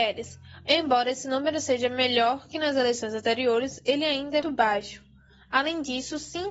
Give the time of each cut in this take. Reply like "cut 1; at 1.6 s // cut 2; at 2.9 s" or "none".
cut 1; at 4.4 s

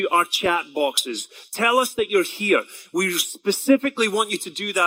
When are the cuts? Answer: none

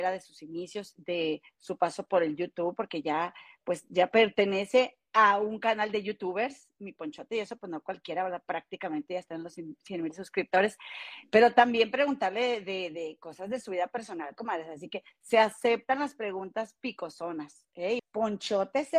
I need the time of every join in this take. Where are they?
cut 1; at 18.0 s

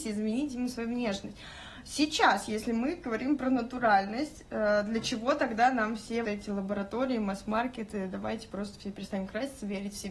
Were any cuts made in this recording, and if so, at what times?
cut 1; at 6.2 s

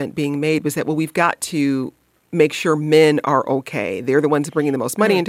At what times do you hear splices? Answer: none

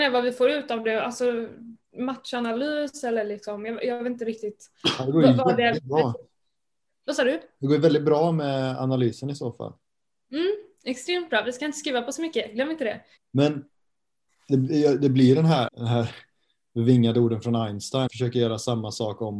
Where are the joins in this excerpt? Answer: cut 1; at 13.2 s // cut 2; at 15.7 s // cut 3; at 18.1 s

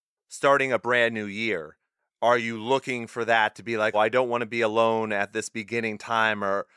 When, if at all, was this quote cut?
cut 1; at 3.9 s

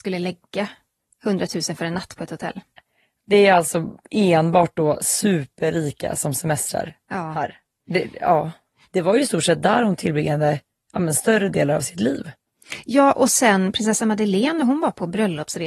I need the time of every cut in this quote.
cut 1; at 8.8 s

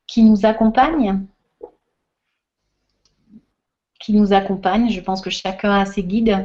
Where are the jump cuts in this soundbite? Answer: none

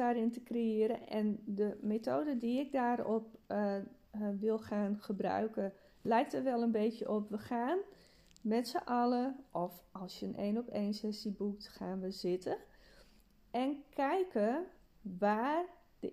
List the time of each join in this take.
none

